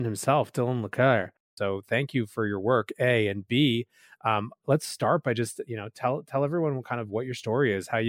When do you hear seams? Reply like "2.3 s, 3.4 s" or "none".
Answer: 1.6 s